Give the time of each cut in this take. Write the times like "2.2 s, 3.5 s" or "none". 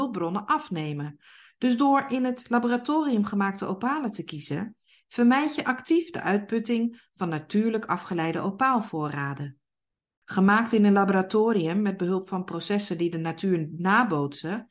none

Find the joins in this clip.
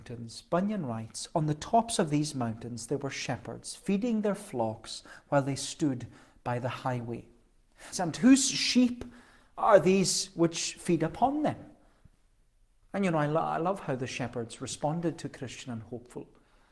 7.9 s

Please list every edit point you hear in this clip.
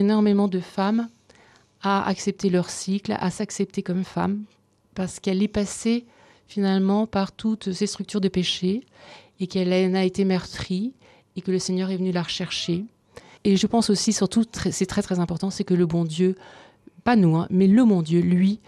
13.4 s

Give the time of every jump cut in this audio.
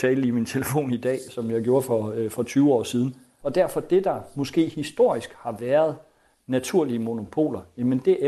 3.4 s

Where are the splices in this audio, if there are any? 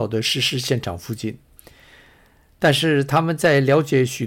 none

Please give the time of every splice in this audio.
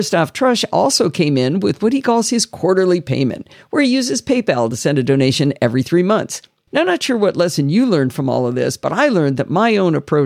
6.7 s

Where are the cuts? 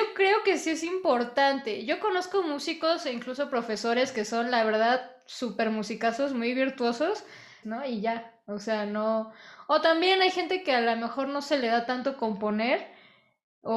7.6 s

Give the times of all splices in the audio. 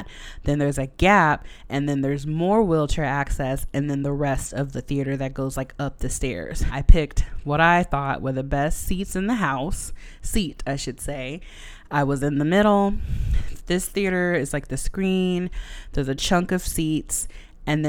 6.7 s

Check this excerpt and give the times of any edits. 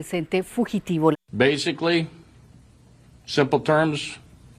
1.1 s

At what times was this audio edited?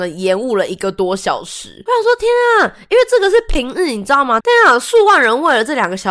4.4 s

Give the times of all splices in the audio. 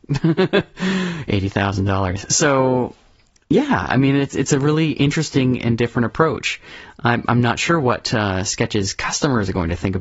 none

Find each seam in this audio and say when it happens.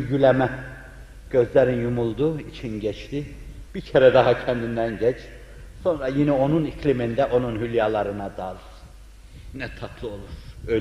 3.7 s

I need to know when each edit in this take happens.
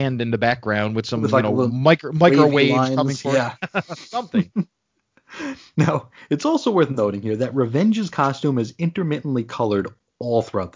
none

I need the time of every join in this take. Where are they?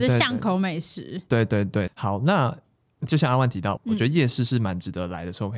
1.9 s, 3.8 s

